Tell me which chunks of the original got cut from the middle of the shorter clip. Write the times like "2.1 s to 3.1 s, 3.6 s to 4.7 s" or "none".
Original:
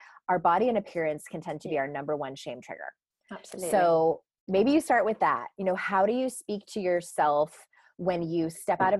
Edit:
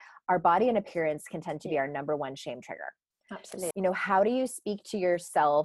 3.7 s to 5.5 s

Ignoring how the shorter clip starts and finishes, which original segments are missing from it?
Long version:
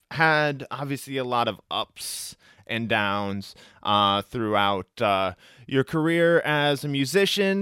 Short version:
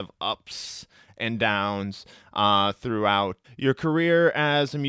4.9 s to 5.5 s

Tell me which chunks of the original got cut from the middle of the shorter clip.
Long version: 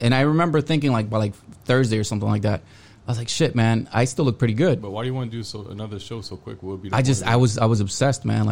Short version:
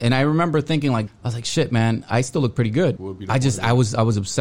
1.1 s to 2.9 s, 4.8 s to 6.6 s

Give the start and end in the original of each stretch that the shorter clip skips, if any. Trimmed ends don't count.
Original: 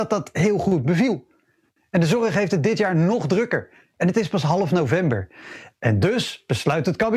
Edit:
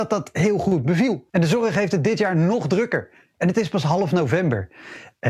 1.3 s to 1.9 s

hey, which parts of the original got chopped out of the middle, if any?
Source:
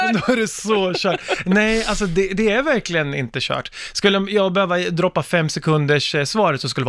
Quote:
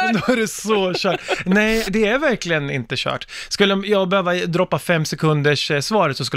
1.8 s to 2.3 s

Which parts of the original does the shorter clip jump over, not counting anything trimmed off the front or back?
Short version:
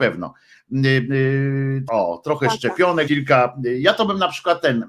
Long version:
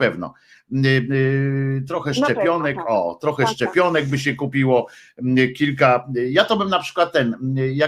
1.9 s to 2.8 s, 4.0 s to 5.6 s

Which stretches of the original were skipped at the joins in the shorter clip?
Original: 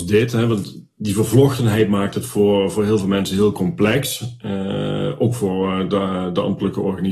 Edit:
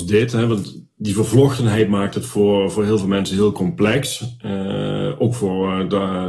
none

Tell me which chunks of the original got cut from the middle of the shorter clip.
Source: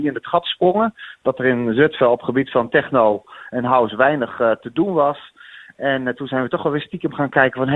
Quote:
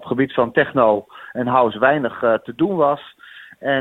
none

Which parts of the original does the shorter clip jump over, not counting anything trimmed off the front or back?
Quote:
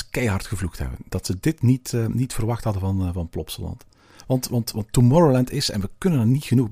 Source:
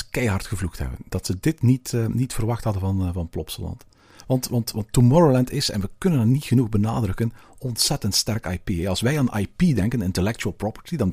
none

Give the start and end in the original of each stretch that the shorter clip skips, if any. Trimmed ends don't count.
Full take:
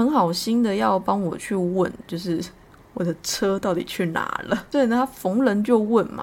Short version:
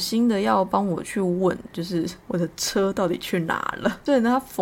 2.5 s to 2.9 s

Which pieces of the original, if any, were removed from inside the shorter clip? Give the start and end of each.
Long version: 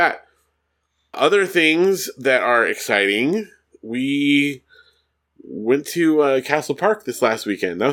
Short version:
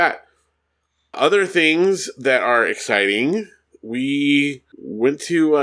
4.7 s to 5.4 s

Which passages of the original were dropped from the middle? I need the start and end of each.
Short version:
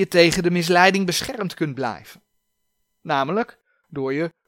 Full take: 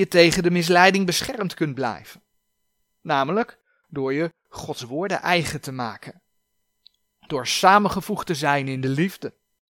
none

